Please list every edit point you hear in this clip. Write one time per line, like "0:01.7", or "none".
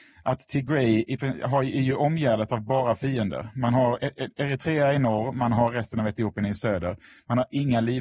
none

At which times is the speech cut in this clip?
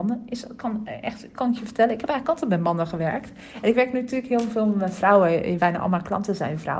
0:01.3

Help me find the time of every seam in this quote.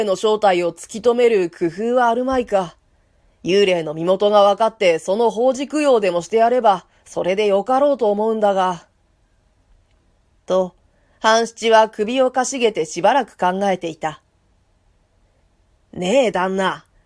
0:10.3

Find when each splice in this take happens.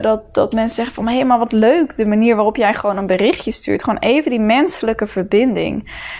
none

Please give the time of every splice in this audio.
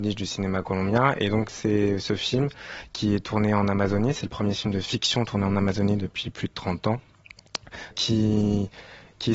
0:07.9

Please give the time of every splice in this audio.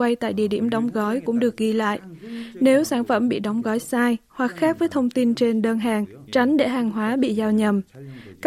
0:06.3

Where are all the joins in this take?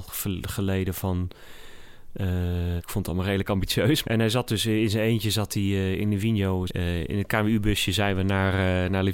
0:02.8
0:04.0
0:06.7

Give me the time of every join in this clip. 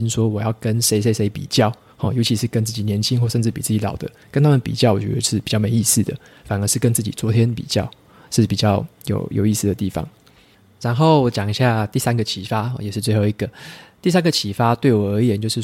none

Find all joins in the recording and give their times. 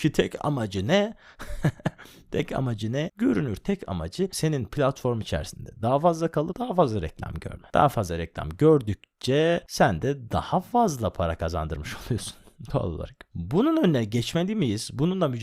0:03.1

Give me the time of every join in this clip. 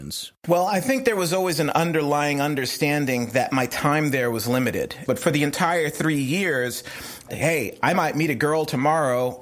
0:05.0
0:07.3

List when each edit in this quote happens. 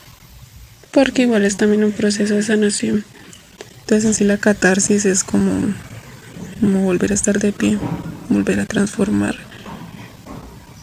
none

